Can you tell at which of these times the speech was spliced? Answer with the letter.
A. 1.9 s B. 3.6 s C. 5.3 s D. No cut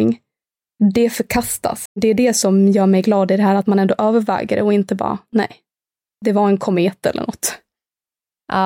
A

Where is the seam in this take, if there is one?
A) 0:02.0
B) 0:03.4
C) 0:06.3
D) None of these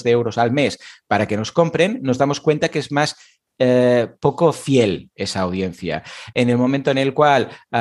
C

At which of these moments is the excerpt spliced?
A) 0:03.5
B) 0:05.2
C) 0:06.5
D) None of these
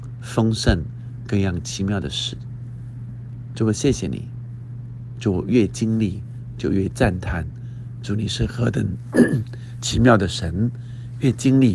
D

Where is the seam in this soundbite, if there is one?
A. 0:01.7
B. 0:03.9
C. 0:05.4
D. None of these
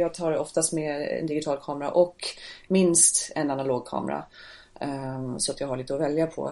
D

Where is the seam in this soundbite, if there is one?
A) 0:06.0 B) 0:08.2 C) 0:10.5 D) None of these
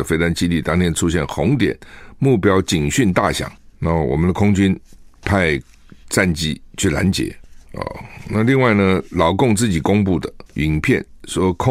C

